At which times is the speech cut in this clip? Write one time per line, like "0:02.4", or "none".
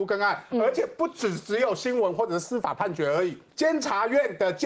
0:03.5